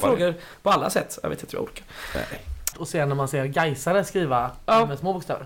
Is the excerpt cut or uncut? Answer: cut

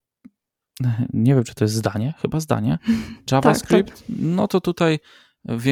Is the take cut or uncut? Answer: cut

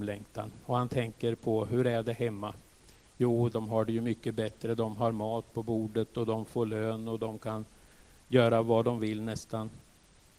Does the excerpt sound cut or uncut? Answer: cut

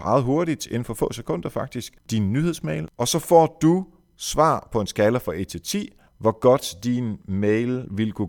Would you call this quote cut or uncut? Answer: cut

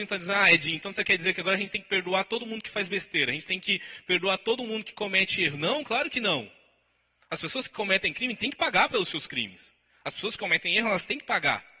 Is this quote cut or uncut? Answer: uncut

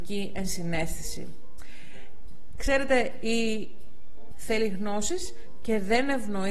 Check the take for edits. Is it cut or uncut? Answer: cut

